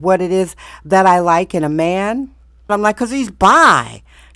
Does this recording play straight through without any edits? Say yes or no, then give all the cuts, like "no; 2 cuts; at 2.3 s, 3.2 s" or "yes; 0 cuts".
no; 1 cut; at 2.7 s